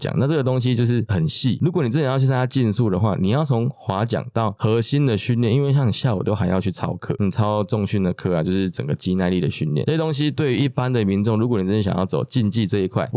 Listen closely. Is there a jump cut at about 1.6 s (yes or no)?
no